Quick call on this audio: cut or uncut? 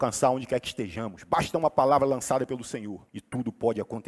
cut